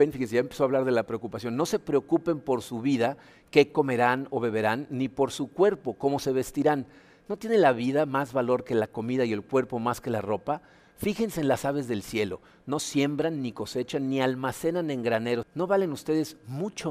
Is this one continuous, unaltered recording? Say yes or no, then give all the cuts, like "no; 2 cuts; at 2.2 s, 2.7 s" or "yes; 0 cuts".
no; 1 cut; at 15.4 s